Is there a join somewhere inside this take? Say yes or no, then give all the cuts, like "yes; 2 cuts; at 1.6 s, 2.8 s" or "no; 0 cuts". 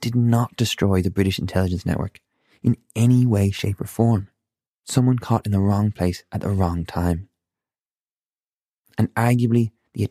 yes; 1 cut; at 4.8 s